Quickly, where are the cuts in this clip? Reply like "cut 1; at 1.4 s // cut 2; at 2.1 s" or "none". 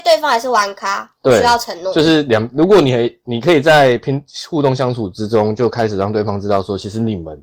none